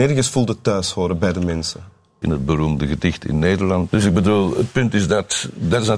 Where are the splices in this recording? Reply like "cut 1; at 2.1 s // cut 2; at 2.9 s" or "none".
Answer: cut 1; at 2.2 s // cut 2; at 3.9 s